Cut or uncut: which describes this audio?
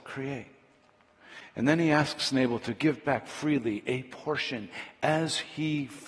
uncut